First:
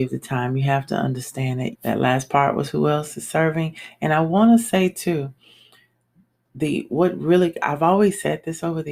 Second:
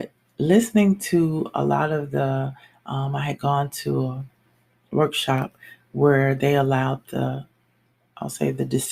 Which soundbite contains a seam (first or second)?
first